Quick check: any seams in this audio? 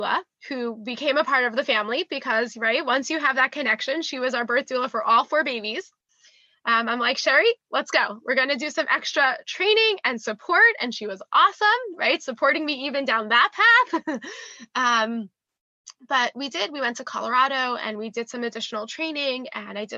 no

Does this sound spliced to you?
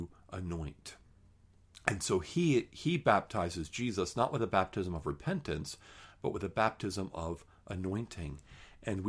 no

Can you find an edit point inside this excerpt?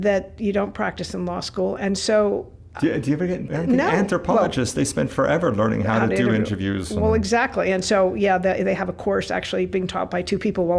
yes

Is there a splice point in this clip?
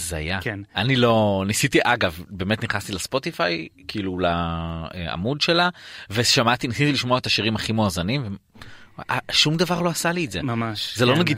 no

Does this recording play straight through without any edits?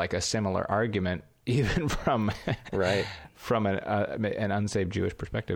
yes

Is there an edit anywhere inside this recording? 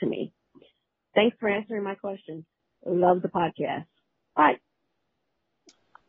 no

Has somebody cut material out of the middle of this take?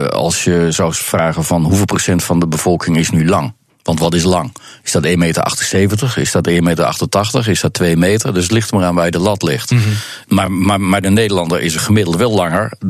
no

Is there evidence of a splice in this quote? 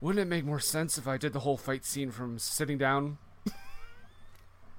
yes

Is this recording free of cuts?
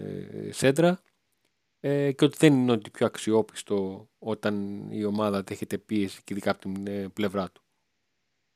yes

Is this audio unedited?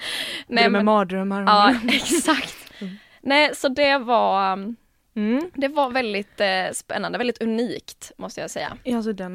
yes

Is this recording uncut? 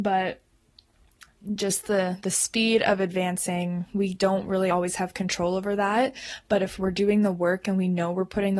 yes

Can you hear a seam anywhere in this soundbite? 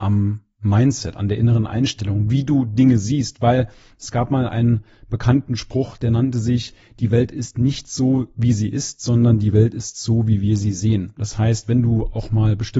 no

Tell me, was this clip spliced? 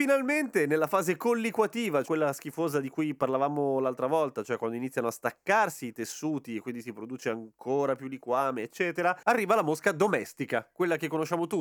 yes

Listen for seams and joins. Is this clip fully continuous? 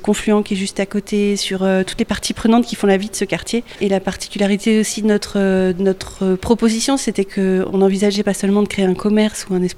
no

